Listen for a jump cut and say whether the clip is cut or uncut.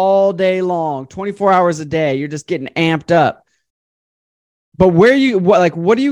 uncut